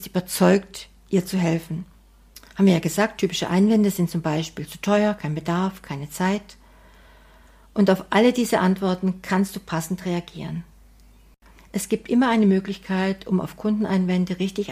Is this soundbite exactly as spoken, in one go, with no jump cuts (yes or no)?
yes